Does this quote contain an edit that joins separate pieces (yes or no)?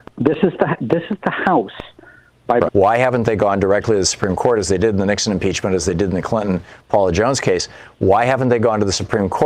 yes